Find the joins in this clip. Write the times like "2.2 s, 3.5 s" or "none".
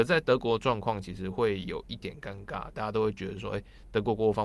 2.7 s